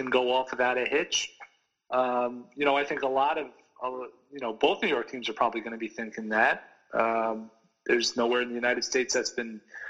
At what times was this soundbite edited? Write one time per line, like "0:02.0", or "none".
none

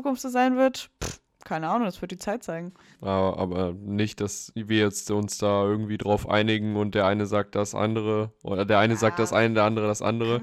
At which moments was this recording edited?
0:02.9

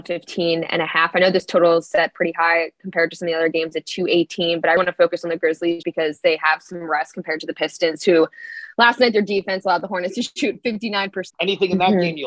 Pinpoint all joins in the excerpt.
0:04.8
0:05.8
0:11.3

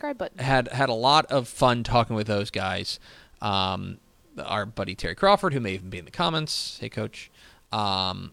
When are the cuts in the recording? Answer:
none

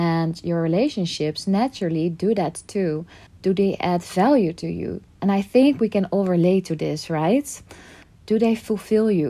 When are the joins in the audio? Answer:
0:03.3
0:05.2
0:08.0

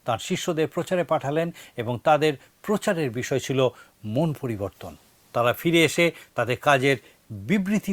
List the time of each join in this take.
none

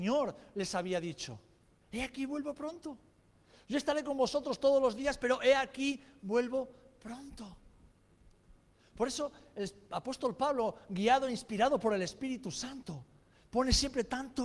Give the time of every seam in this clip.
0:01.7

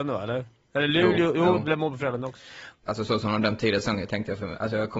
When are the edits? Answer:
0:02.8

